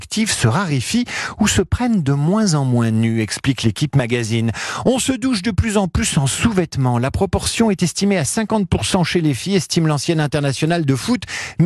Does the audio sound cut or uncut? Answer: uncut